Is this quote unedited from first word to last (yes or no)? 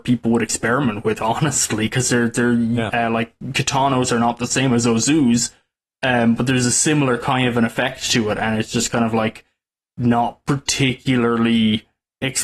no